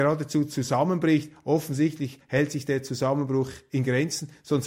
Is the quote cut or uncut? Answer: uncut